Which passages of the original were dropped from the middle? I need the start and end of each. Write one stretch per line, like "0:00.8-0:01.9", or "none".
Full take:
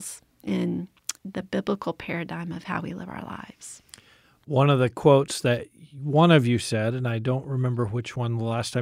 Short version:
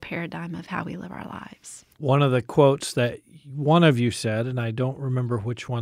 0:03.9-0:04.4